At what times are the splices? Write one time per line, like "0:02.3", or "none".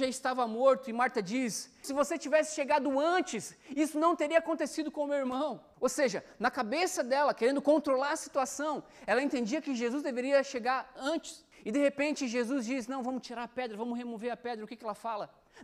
0:01.8